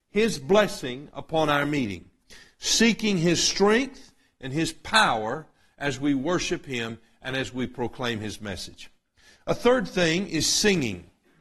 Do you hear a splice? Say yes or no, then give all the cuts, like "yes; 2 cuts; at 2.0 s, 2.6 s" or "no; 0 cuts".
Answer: no; 0 cuts